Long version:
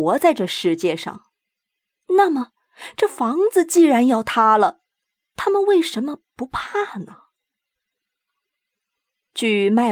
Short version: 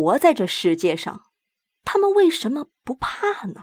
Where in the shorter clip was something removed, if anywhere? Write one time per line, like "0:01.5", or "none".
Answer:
0:01.8